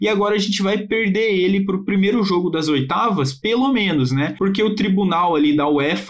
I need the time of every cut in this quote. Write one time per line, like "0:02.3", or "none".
none